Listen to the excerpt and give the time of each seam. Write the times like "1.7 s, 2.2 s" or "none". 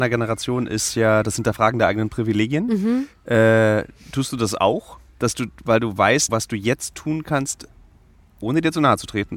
6.3 s